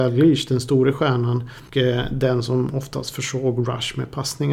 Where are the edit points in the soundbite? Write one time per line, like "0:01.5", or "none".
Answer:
none